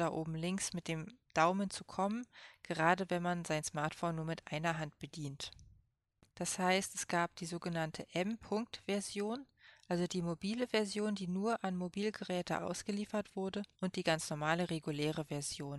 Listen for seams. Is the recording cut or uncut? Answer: cut